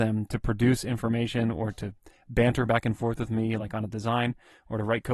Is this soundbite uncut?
yes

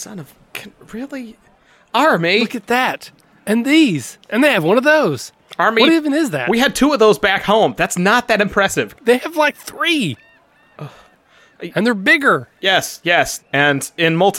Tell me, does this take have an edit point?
yes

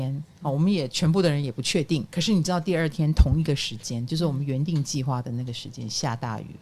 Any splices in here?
no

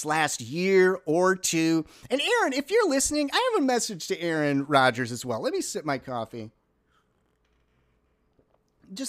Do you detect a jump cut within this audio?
no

